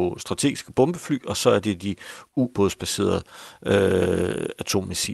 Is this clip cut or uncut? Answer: uncut